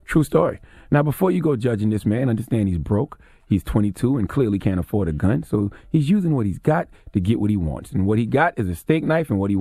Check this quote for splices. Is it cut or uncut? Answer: uncut